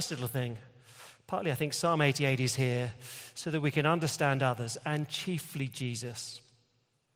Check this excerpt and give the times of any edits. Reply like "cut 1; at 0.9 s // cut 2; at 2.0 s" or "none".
none